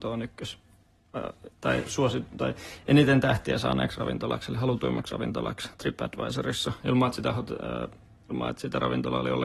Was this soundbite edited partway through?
no; 0 cuts

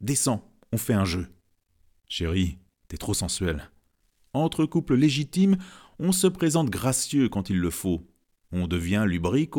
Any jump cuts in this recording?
no; 0 cuts

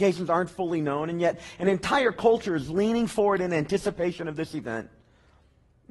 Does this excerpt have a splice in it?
no; 0 cuts

